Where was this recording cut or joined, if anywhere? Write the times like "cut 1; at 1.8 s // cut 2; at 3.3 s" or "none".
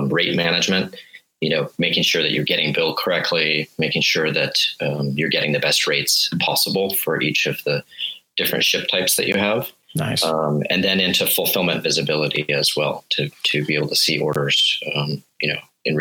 none